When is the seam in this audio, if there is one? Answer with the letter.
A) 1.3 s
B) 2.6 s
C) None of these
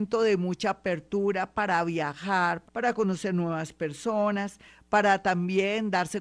B